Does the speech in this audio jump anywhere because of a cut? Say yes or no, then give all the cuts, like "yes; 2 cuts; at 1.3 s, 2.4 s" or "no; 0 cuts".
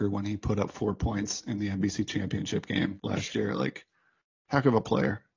no; 0 cuts